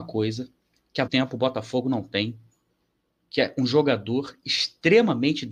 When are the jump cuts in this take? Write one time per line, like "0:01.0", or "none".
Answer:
0:01.1